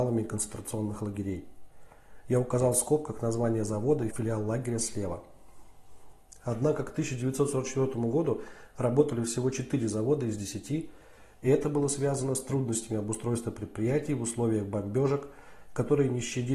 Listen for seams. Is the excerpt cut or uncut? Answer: cut